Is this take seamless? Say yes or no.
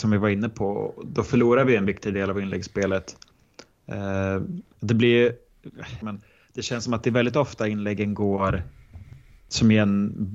no